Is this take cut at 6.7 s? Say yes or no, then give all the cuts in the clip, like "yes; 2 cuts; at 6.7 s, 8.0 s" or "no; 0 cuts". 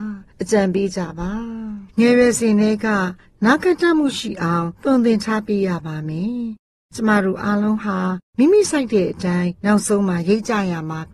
no; 1 cut; at 1.9 s